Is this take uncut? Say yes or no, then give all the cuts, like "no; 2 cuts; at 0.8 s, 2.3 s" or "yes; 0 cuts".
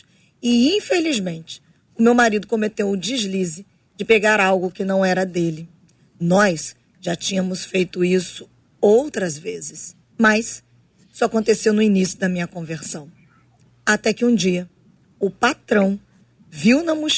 no; 1 cut; at 10.1 s